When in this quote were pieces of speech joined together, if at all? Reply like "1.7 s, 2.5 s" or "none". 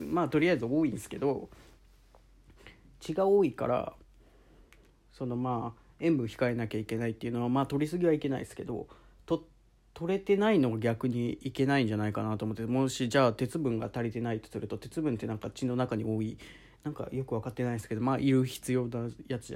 none